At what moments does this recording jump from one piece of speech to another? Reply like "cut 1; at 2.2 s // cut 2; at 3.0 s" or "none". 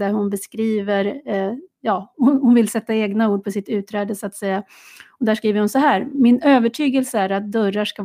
none